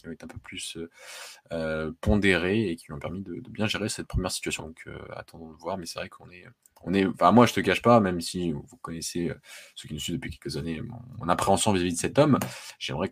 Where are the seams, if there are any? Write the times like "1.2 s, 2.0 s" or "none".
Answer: 4.6 s